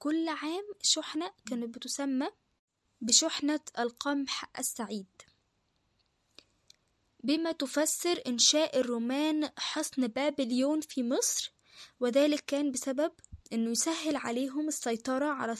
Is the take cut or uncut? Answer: uncut